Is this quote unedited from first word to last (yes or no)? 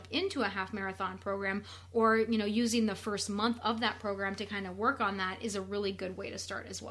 yes